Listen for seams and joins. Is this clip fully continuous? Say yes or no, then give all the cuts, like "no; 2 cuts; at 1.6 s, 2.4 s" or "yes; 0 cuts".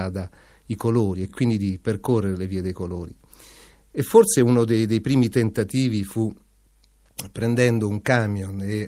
yes; 0 cuts